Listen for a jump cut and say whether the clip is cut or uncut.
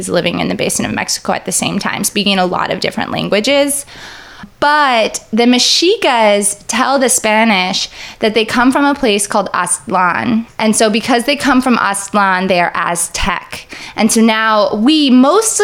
uncut